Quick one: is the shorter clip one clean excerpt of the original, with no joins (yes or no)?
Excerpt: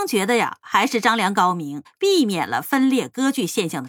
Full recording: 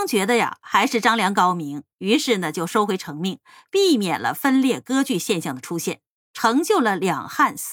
no